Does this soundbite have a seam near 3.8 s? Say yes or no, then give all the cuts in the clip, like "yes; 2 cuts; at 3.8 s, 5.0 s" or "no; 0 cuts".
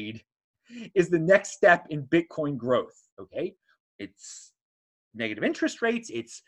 yes; 1 cut; at 3.8 s